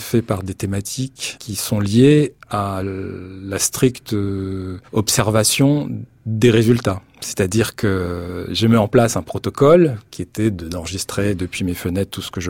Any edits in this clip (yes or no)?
no